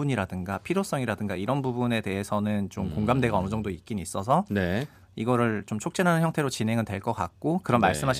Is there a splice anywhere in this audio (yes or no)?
no